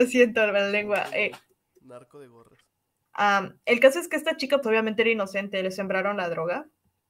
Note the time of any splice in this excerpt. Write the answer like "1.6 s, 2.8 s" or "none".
3.1 s, 4.6 s